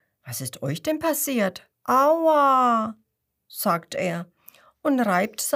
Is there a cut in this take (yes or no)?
yes